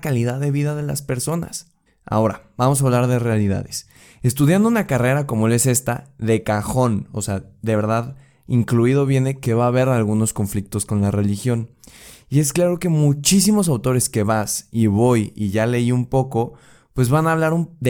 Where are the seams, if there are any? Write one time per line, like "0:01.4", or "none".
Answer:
0:01.9